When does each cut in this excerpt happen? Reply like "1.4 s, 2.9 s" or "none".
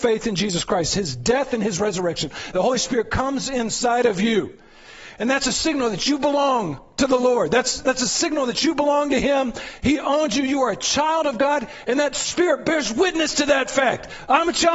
none